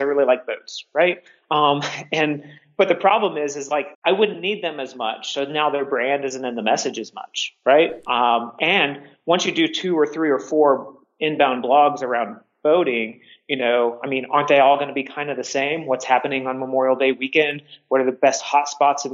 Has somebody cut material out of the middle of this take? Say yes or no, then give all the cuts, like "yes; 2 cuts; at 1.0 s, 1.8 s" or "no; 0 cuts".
yes; 1 cut; at 3.9 s